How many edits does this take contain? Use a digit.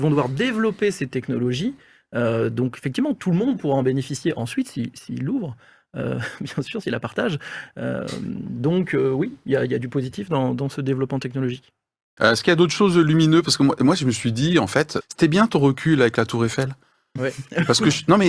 2